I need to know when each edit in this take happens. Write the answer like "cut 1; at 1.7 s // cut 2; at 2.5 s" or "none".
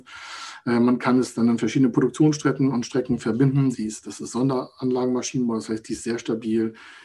cut 1; at 3.7 s